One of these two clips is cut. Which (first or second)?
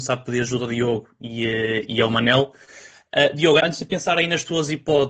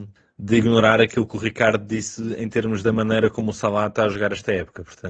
first